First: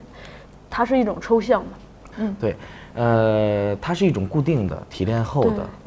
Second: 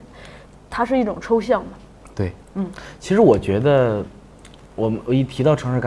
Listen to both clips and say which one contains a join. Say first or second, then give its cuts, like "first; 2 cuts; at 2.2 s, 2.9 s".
first; 1 cut; at 2.1 s